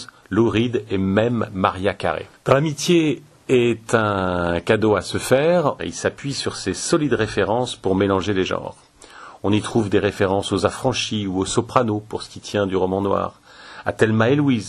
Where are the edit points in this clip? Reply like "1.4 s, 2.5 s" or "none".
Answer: 5.8 s